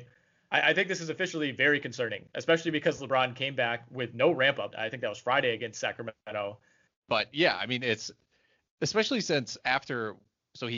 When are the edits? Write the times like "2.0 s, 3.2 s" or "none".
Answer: 4.7 s, 6.9 s